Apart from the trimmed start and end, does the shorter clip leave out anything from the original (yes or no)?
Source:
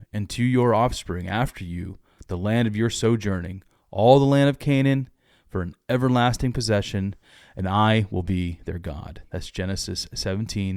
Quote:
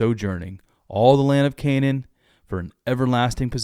no